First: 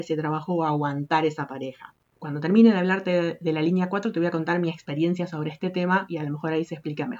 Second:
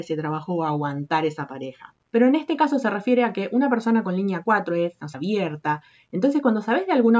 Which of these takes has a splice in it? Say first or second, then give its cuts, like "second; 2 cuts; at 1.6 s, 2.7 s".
second; 2 cuts; at 2.1 s, 5.1 s